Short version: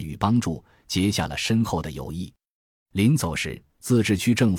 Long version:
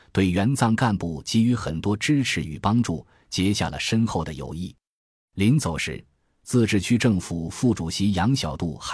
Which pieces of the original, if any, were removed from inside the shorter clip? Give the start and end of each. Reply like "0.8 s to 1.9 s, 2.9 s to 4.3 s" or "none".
6.1 s to 6.3 s